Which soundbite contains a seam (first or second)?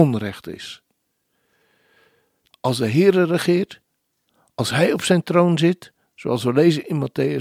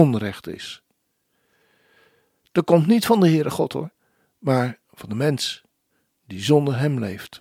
first